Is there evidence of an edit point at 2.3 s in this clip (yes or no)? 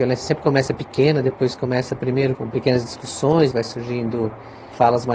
yes